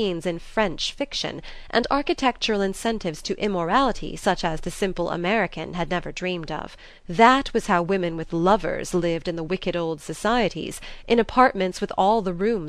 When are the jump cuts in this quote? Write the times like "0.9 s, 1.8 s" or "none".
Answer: 7.0 s

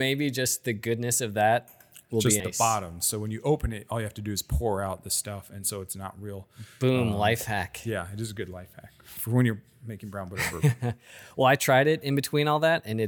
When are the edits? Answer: 2.4 s

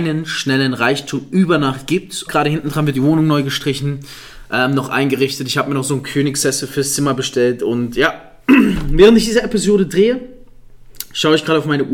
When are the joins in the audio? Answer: 2.3 s

